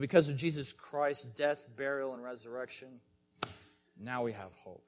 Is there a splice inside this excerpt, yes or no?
no